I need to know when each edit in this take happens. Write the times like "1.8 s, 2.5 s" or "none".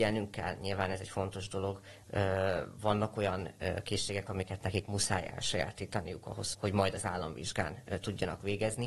6.5 s

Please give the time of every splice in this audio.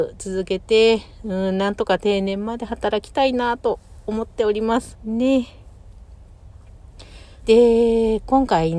4.9 s, 7.4 s

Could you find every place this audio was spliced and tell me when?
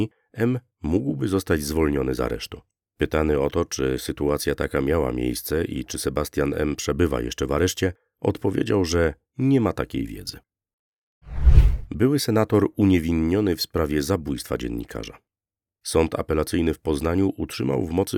none

